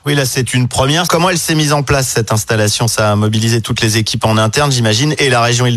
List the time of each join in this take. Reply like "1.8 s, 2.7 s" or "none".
1.1 s